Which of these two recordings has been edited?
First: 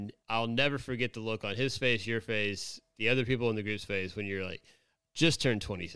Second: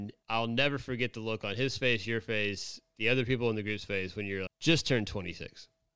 second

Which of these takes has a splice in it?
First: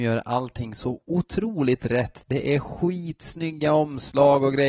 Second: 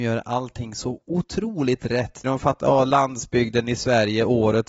second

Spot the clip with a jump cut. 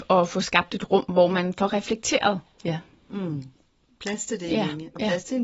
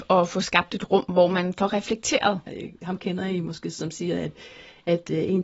second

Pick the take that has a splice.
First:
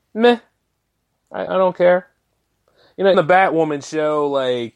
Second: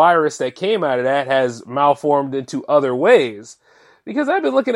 first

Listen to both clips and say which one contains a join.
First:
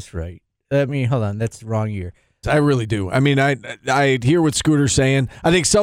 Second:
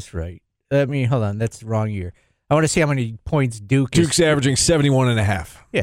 first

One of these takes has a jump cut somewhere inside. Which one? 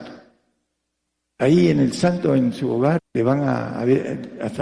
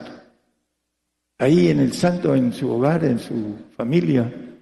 first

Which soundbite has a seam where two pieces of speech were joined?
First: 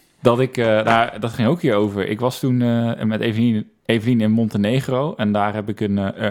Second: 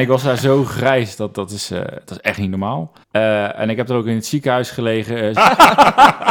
second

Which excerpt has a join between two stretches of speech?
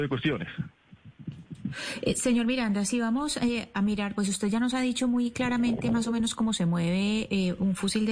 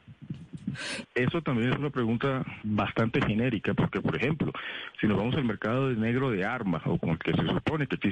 second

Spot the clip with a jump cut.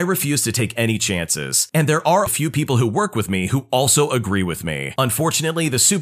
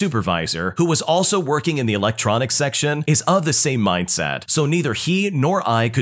first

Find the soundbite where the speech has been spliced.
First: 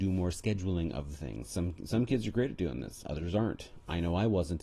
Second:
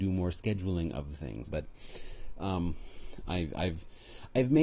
second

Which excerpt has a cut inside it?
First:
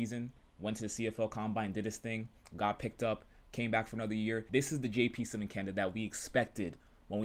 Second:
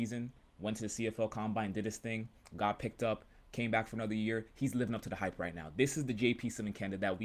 first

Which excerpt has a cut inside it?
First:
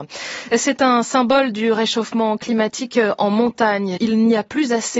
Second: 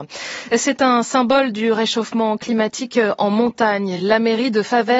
first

